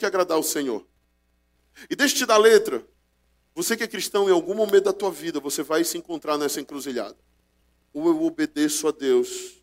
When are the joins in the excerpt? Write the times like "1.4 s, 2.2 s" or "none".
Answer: none

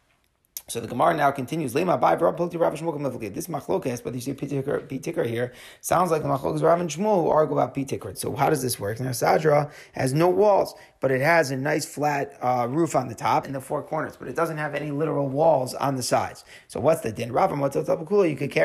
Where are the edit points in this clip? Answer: 8.1 s, 13.4 s

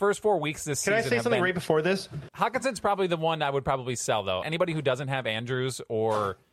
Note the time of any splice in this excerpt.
2.3 s, 4.4 s

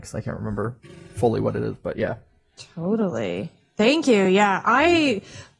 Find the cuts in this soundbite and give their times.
none

